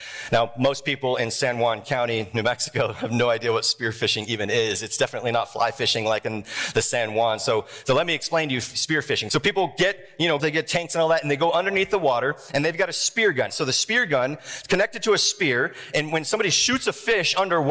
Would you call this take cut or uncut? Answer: cut